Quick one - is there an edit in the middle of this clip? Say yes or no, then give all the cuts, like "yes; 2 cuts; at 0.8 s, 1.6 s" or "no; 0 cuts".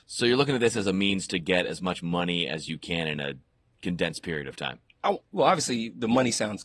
yes; 1 cut; at 5.2 s